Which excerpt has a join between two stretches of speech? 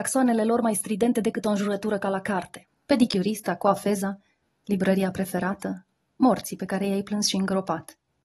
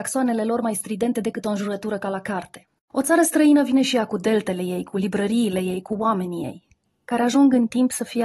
second; 1 cut; at 2.8 s

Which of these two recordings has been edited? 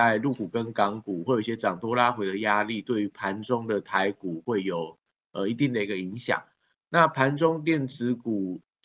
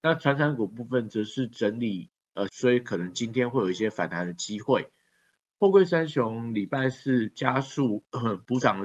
second; 1 cut; at 2.5 s

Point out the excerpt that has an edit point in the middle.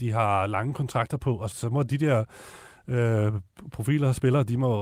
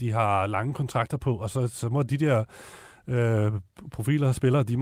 first; 1 cut; at 1.5 s

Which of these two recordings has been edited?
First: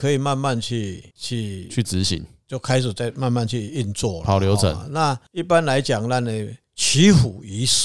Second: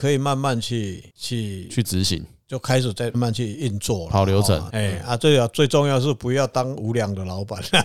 second; 2 cuts; at 3.1 s, 4.7 s

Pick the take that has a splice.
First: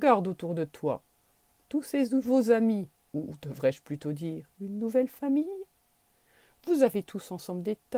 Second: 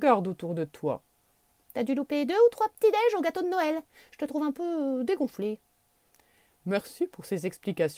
second; 1 cut; at 1.6 s

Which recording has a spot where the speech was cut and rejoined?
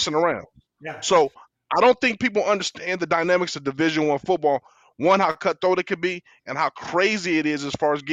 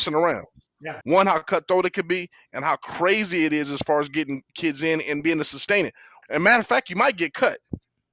second; 2 cuts; at 1.0 s, 6.2 s

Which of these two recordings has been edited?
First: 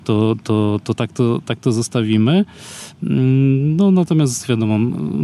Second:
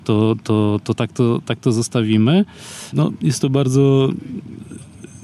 second; 1 cut; at 2.9 s

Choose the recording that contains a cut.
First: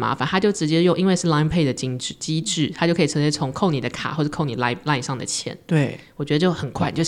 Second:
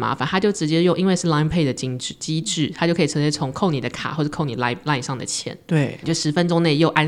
second; 1 cut; at 6.0 s

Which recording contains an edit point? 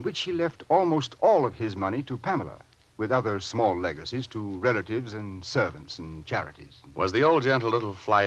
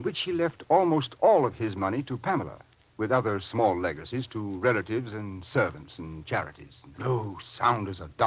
second; 1 cut; at 6.9 s

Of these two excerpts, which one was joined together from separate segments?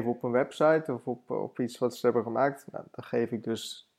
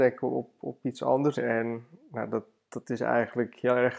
second; 1 cut; at 1.3 s

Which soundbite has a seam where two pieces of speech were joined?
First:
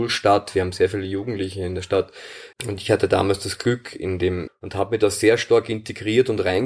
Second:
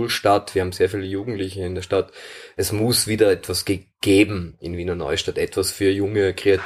first; 2 cuts; at 2.5 s, 4.5 s

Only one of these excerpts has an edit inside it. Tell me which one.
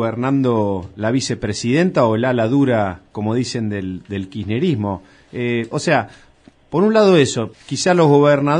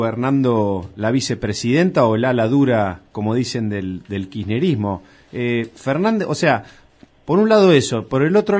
first; 2 cuts; at 5.7 s, 7.5 s

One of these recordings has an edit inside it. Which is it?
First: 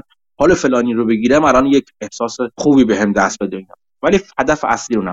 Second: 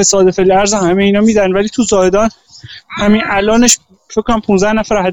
first; 1 cut; at 2.5 s

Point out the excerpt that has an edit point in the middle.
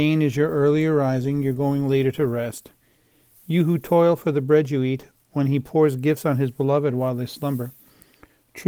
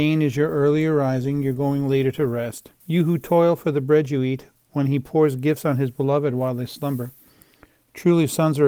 second; 1 cut; at 2.8 s

